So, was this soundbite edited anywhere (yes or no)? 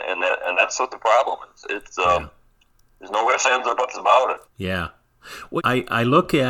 yes